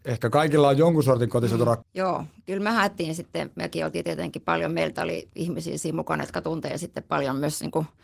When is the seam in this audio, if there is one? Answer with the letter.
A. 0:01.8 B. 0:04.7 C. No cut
A